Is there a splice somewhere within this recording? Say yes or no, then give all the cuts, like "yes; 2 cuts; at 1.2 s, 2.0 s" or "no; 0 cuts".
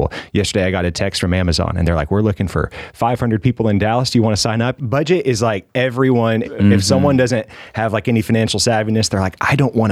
yes; 2 cuts; at 4.8 s, 6.4 s